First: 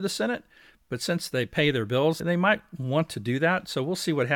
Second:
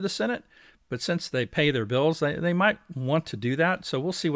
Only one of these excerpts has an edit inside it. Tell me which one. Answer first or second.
first